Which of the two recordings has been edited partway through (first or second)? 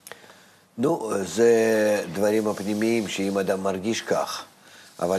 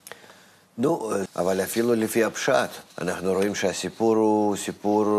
second